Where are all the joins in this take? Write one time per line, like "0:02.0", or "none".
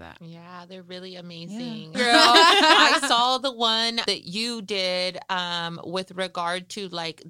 0:01.9
0:04.1